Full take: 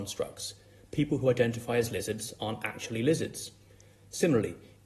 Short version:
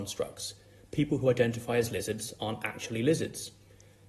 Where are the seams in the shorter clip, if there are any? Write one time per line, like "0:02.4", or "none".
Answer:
none